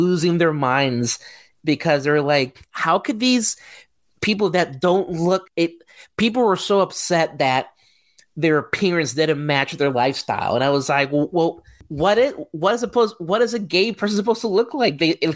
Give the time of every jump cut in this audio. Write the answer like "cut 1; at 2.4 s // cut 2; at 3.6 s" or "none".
cut 1; at 5.5 s

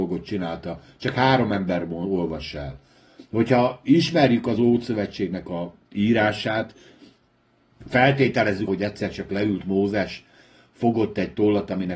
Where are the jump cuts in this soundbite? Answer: cut 1; at 8.7 s

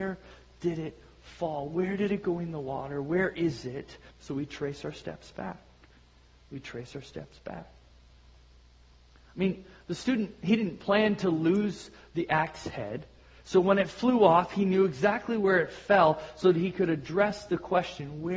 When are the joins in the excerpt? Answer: cut 1; at 4.1 s

